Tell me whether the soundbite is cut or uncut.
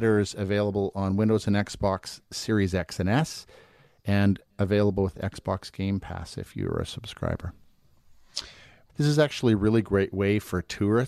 cut